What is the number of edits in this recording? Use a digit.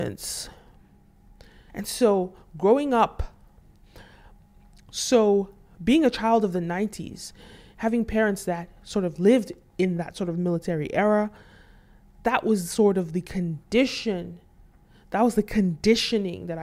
1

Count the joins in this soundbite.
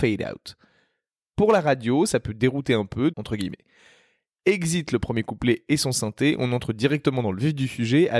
1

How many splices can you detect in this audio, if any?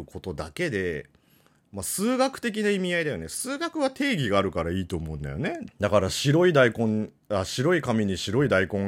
1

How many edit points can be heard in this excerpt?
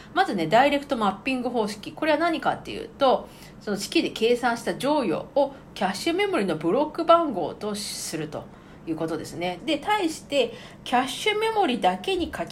2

